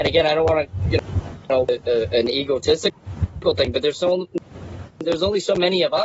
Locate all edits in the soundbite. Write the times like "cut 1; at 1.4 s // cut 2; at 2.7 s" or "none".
none